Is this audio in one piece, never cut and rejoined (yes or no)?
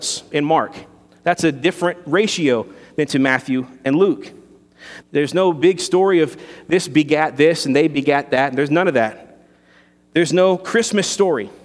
no